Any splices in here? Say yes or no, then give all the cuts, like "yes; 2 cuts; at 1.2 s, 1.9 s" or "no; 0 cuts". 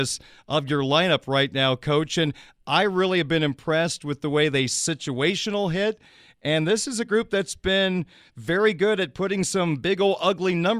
no; 0 cuts